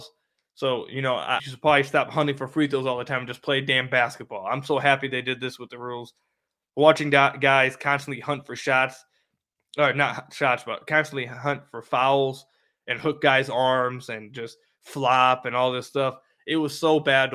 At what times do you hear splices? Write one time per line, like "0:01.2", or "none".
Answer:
0:01.4